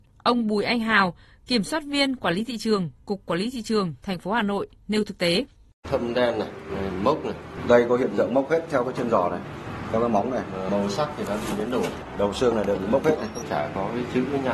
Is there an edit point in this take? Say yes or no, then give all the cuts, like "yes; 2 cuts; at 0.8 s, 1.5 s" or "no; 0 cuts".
no; 0 cuts